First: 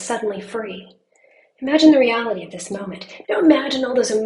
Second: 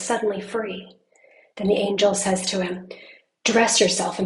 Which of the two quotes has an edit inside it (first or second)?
first